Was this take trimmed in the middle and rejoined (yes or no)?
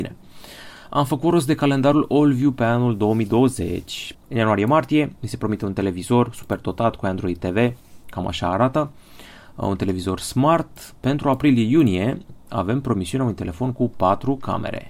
yes